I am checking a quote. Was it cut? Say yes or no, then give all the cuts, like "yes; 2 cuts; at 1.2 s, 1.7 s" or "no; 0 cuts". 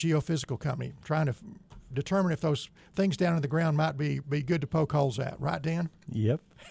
no; 0 cuts